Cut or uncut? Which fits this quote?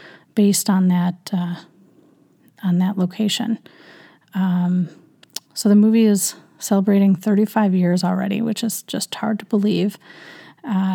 uncut